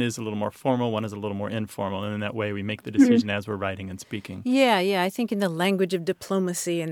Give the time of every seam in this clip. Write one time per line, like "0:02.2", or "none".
none